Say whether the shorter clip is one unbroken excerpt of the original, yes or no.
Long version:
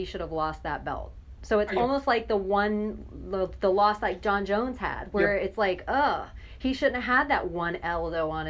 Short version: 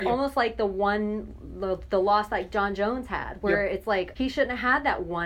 no